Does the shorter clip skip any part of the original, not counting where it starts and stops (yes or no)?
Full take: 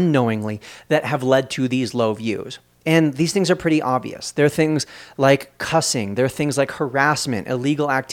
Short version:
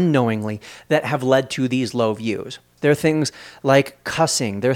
yes